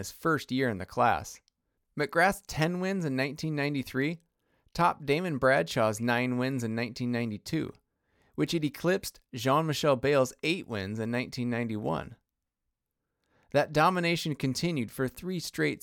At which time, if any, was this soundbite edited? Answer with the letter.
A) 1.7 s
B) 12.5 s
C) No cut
C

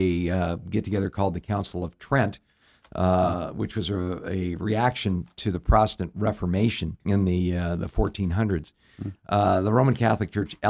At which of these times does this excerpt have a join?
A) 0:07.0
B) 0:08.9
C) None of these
A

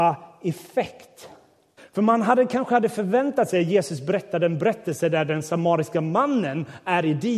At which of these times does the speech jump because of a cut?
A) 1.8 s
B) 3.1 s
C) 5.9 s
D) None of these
A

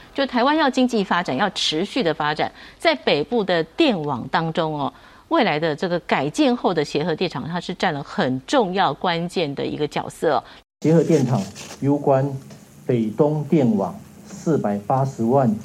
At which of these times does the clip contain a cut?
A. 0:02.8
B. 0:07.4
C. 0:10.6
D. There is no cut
C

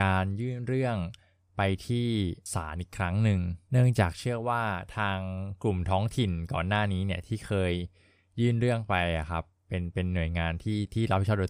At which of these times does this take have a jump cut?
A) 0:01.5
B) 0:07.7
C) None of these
C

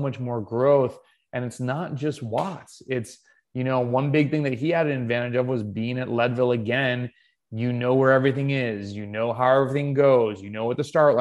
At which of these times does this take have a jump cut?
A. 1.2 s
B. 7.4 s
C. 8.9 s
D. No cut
D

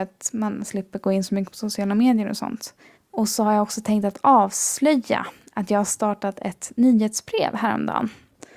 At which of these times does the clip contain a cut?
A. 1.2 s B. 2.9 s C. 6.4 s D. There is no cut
B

